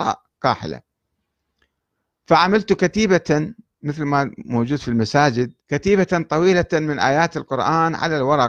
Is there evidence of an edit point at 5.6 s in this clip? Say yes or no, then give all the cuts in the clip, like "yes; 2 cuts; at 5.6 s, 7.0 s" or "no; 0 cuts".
yes; 1 cut; at 5.6 s